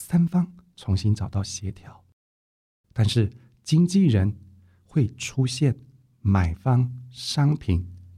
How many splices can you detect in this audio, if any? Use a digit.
1